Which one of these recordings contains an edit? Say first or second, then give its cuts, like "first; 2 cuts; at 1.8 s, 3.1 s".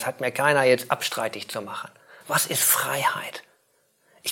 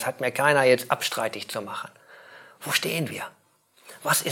first; 1 cut; at 2.2 s